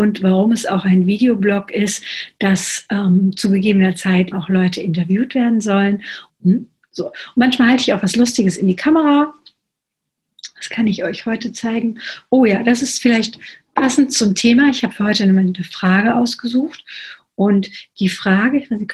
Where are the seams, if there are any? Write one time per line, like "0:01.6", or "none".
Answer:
0:04.3
0:06.3